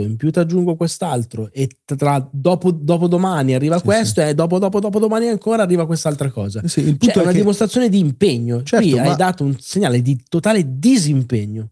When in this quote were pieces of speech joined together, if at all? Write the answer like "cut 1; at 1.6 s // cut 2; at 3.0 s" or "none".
none